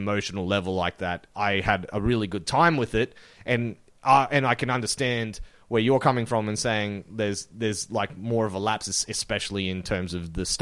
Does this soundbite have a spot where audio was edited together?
no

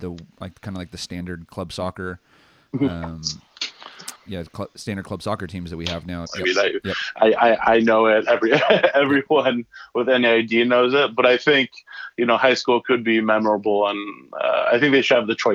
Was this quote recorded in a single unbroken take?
no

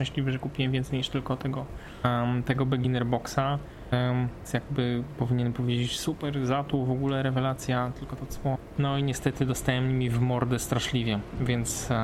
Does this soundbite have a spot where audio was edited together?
yes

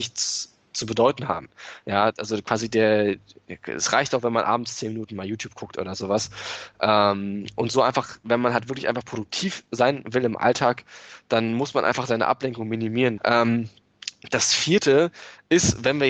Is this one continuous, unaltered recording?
no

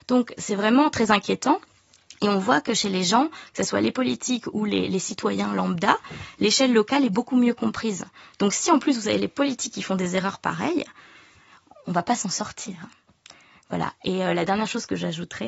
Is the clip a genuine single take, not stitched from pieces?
yes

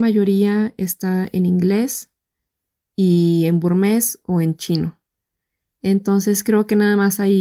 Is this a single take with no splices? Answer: yes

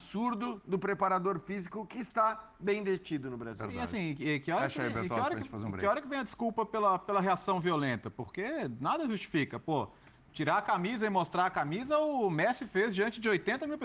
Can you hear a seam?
no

